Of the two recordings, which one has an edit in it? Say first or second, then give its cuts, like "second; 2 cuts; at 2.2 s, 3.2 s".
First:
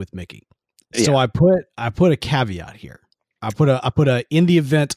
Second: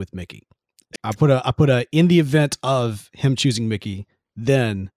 second; 1 cut; at 1.0 s